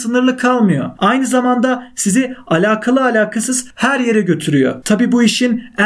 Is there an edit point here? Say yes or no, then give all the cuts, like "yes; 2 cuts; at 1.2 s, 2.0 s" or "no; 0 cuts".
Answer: yes; 1 cut; at 4.8 s